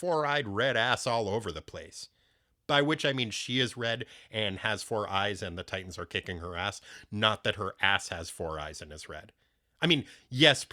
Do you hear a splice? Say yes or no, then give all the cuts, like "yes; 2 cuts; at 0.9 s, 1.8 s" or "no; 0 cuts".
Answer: no; 0 cuts